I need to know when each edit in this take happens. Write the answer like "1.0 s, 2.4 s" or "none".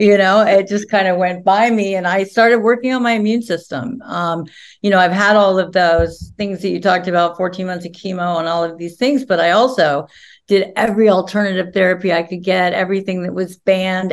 none